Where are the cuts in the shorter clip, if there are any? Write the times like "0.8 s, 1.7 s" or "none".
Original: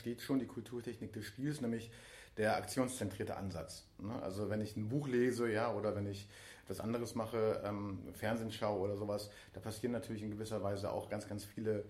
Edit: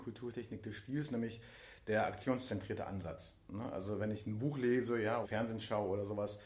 5.2 s